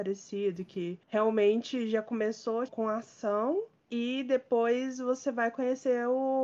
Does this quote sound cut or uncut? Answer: cut